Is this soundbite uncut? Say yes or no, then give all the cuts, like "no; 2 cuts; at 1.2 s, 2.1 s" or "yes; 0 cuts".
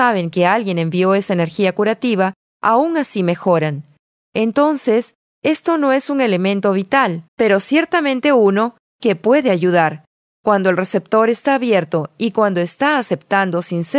no; 1 cut; at 7.3 s